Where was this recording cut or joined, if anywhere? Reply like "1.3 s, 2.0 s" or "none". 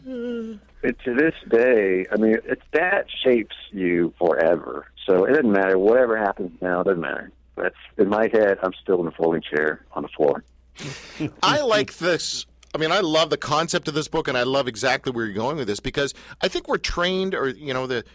2.4 s